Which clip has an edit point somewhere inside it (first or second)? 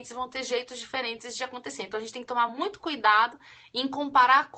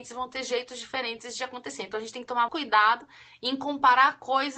second